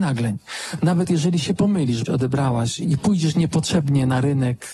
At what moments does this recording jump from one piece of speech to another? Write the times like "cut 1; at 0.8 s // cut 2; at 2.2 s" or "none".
cut 1; at 2.1 s